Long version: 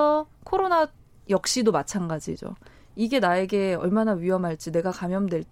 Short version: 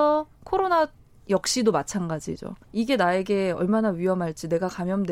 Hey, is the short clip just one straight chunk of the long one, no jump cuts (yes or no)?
no